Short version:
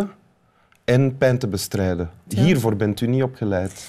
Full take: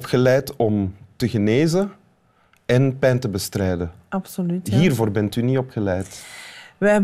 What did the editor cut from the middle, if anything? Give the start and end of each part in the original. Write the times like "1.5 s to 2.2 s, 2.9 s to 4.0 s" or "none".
4.1 s to 4.6 s

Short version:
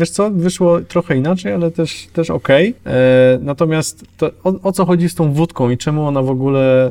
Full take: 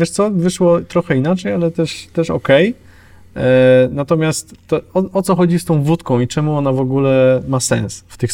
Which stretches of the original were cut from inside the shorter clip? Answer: 2.8 s to 3.3 s

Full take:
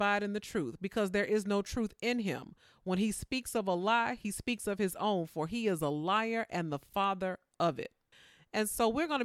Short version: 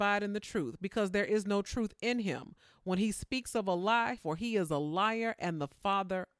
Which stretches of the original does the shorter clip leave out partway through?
4.2 s to 5.3 s

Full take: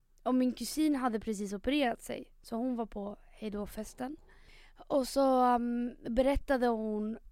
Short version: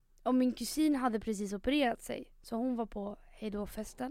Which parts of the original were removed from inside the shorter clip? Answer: none

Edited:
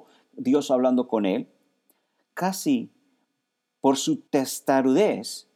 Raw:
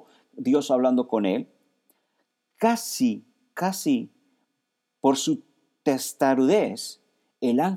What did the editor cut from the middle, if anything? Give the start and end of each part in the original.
2.3 s to 3.5 s, 5.5 s to 5.8 s

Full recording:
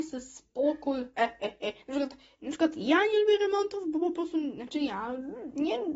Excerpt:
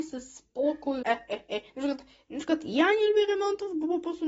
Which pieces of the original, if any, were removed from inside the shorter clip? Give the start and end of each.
1.0 s to 1.1 s

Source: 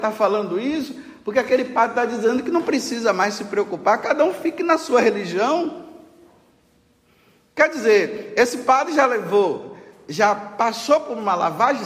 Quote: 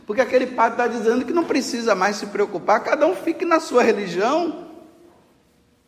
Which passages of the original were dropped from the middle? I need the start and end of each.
none

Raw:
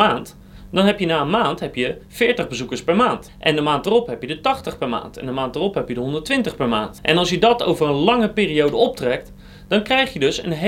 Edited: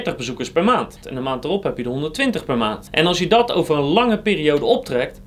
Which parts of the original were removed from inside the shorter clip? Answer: 3.3 s to 5.1 s

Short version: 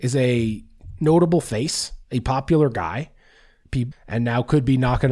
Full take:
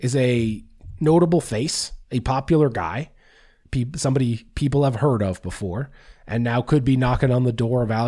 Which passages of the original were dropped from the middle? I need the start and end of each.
3.9 s to 6.1 s

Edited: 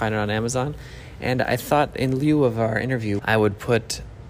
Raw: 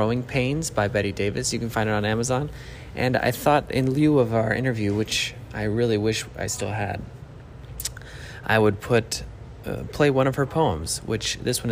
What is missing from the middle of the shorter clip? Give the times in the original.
4.9 s to 8.4 s

